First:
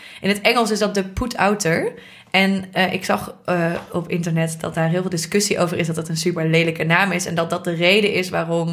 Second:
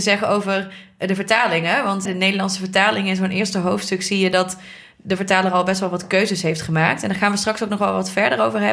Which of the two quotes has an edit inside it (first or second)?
second